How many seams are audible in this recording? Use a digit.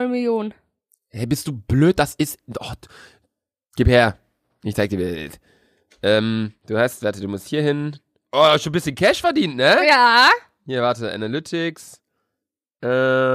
0